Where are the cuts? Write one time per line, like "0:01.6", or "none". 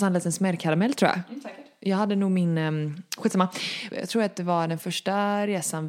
0:03.9